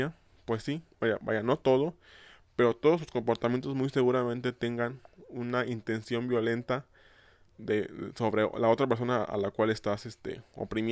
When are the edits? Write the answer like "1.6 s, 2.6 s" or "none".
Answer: 1.0 s